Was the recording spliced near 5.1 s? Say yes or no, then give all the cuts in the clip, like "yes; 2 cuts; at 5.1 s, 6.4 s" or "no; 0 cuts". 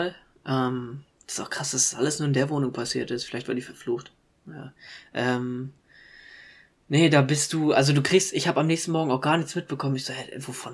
no; 0 cuts